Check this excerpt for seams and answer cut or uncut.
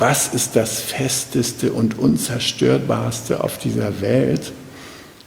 uncut